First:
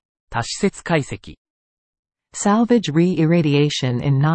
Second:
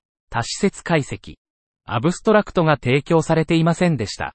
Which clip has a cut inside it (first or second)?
second